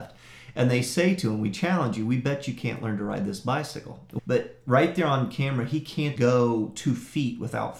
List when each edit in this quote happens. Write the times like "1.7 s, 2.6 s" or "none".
4.2 s, 6.2 s

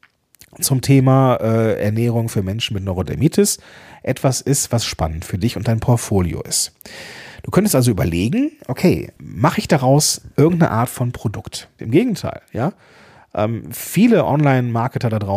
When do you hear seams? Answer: 9.2 s, 11.8 s

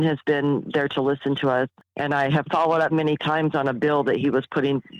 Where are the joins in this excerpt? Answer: 1.8 s, 2.9 s

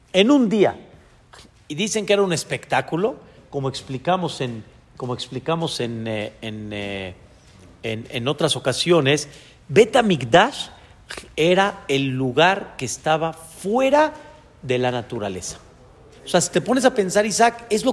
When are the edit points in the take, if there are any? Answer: 3.4 s, 16.1 s

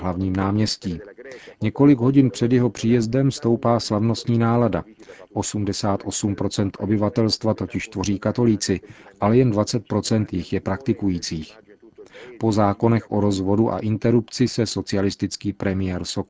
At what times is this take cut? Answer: 5.3 s

